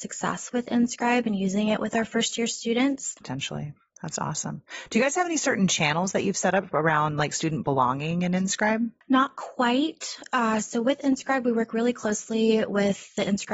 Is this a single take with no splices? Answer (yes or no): no